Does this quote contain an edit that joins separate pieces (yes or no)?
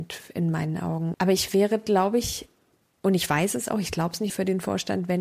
yes